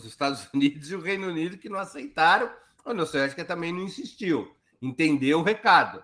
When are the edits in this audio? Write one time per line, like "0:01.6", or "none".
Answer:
none